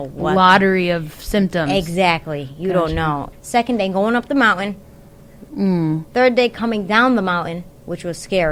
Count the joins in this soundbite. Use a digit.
2